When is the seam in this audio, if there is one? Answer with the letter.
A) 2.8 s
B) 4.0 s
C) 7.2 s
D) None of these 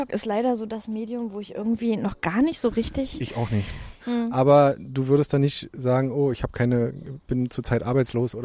B